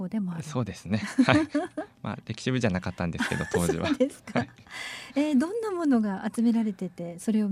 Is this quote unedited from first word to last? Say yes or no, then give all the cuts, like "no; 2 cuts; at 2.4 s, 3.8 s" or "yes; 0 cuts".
yes; 0 cuts